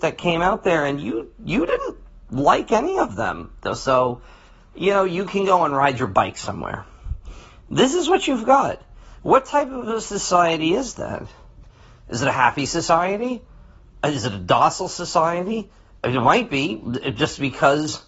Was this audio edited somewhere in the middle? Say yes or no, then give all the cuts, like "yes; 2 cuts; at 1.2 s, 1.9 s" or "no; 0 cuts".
no; 0 cuts